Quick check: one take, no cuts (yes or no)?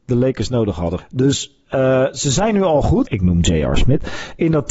no